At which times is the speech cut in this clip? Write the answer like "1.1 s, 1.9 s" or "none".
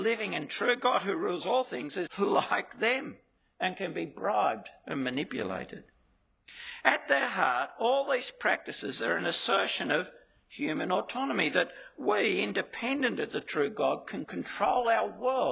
2.1 s